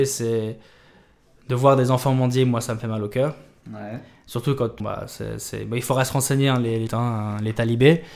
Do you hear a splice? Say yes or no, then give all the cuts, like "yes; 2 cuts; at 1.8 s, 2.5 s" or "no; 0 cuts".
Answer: yes; 2 cuts; at 4.8 s, 6.9 s